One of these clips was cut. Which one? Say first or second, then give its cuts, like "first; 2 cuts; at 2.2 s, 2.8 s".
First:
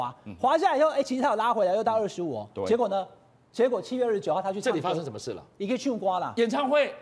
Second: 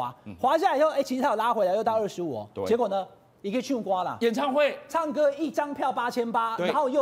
second; 1 cut; at 3.3 s